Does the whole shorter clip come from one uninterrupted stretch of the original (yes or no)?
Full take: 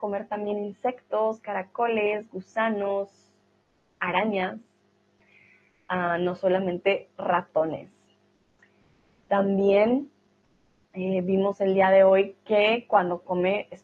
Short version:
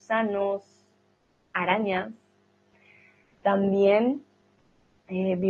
no